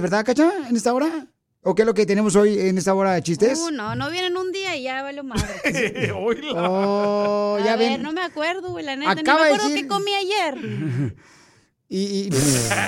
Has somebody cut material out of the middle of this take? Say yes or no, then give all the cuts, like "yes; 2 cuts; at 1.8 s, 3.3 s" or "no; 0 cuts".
no; 0 cuts